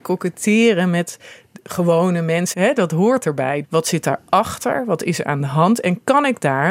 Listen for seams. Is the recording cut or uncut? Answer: cut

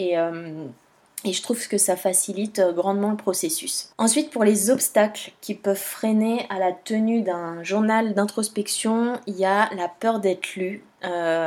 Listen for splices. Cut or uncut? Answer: uncut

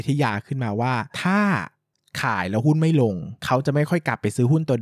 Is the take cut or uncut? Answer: cut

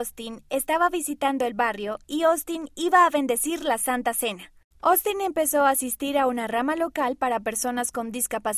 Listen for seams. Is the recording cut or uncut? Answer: cut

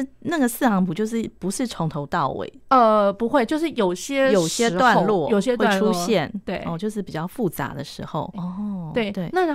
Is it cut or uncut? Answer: cut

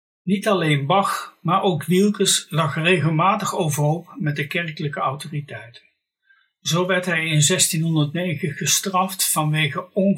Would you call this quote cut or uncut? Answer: uncut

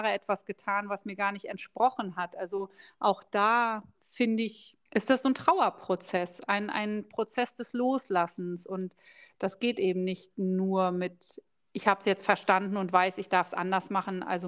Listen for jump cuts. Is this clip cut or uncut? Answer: cut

